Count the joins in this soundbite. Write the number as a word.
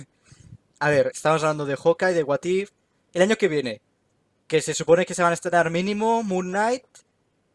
one